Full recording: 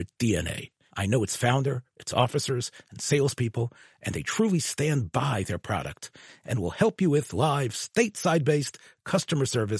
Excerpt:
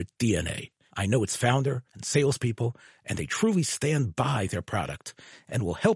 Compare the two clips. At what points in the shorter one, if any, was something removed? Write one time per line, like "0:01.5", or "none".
0:01.9